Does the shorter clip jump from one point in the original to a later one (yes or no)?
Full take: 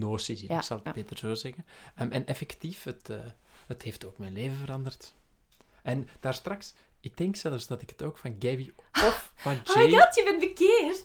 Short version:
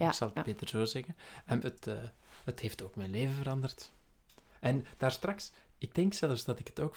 yes